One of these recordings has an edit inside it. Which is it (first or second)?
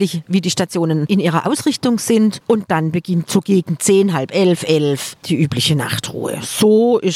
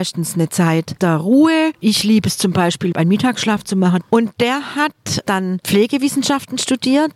second